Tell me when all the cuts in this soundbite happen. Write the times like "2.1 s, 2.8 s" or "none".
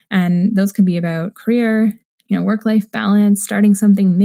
none